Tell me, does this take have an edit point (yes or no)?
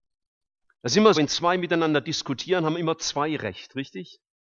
yes